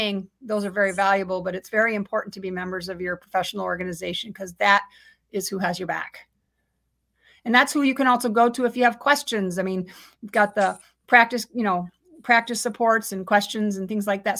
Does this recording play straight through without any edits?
yes; 0 cuts

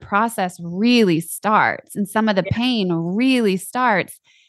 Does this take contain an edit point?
no; 0 cuts

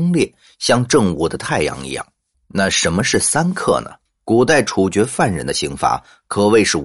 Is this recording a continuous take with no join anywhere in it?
no; 2 cuts; at 2.3 s, 4.1 s

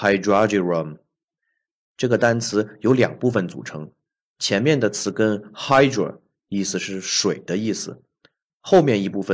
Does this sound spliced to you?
no; 0 cuts

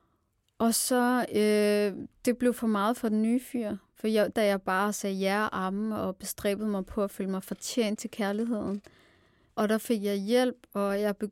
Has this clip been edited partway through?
yes; 2 cuts; at 4.3 s, 9.5 s

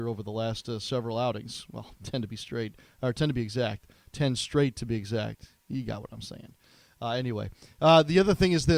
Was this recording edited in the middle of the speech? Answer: no; 0 cuts

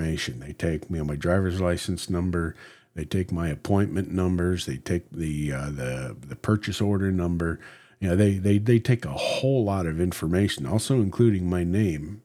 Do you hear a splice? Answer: no; 0 cuts

